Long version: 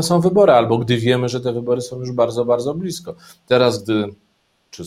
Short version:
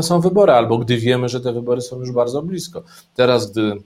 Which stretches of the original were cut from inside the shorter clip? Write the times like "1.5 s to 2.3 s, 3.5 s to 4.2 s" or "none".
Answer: 2.1 s to 2.4 s